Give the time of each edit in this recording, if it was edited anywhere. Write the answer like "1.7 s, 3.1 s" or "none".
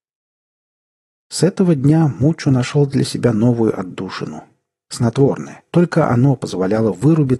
5.7 s